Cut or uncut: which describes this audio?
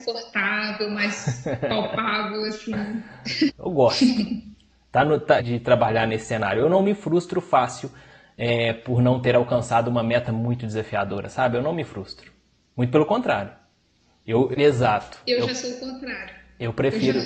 cut